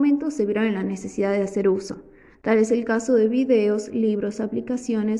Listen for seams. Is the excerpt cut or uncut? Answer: uncut